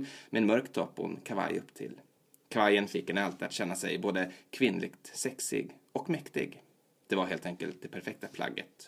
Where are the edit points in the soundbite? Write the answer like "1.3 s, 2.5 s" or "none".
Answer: none